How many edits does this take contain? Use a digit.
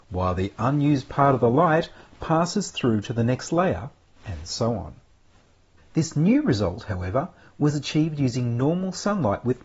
1